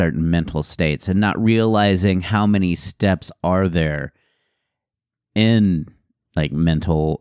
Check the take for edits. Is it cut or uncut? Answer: uncut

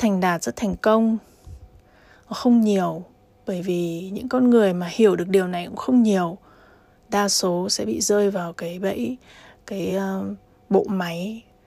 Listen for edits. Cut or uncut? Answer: uncut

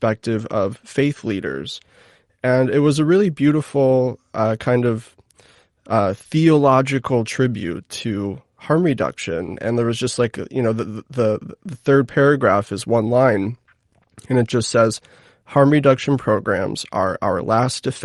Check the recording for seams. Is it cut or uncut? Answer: uncut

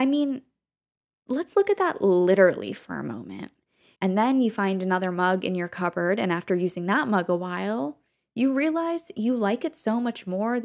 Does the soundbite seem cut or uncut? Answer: cut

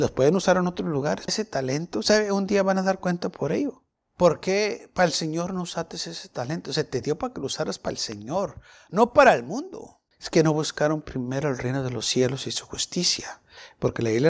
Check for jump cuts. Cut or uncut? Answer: cut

